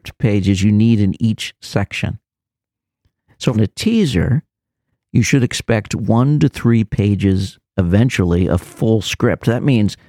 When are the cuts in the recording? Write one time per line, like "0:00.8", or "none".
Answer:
0:03.5